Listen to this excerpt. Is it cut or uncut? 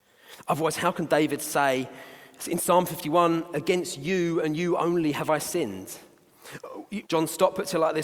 cut